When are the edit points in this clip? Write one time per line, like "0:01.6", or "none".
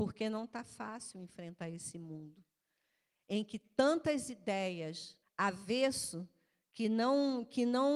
0:05.2

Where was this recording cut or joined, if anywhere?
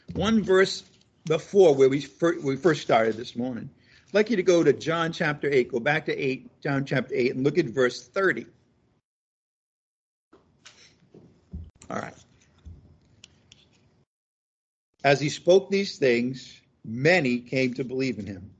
none

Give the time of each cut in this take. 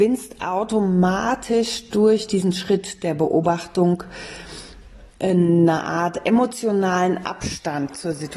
0:05.1

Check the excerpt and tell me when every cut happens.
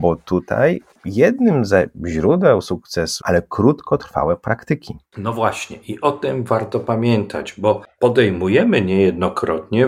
0:03.2

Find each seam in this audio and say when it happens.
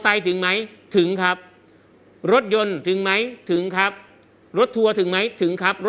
none

